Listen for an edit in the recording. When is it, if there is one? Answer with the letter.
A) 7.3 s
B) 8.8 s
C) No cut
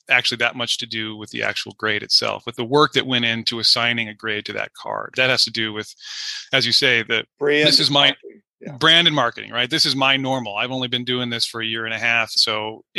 A